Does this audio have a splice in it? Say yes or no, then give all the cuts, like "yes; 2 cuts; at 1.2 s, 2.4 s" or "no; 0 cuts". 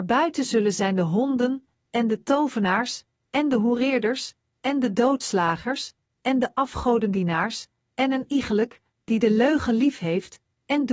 no; 0 cuts